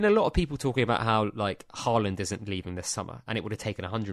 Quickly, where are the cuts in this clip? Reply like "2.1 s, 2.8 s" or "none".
none